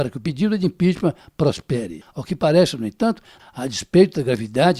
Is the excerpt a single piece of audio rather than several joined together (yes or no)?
no